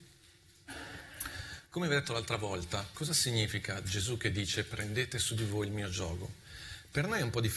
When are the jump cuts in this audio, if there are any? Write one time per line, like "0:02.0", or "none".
0:02.9